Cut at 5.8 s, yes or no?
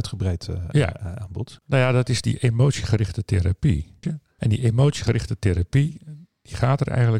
no